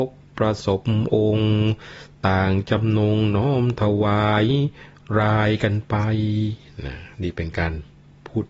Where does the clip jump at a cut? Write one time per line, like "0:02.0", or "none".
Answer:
0:07.1